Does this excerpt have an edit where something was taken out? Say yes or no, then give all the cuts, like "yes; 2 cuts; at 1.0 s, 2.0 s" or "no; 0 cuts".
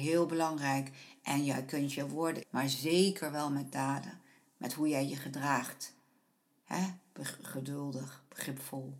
yes; 1 cut; at 2.4 s